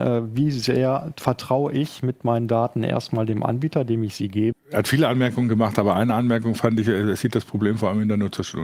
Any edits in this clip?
yes; 1 cut; at 4.5 s

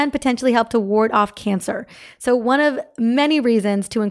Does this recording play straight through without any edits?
yes; 0 cuts

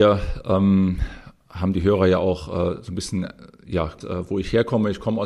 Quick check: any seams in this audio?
yes; 1 cut; at 4.0 s

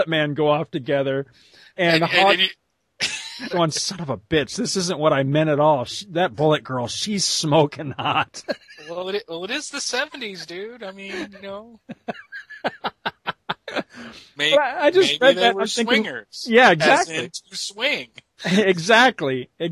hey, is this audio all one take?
no; 1 cut; at 3.5 s

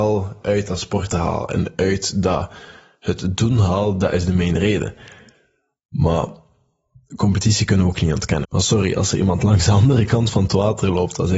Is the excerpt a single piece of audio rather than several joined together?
no; 1 cut; at 8.4 s

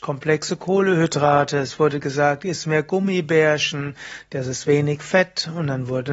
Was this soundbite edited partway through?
no; 0 cuts

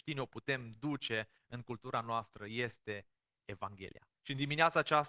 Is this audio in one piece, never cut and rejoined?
no; 1 cut; at 4.2 s

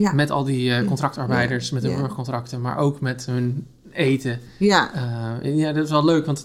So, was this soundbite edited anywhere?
no; 0 cuts

